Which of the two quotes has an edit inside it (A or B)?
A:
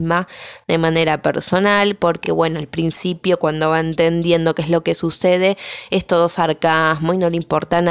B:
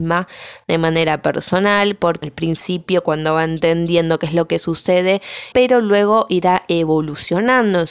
B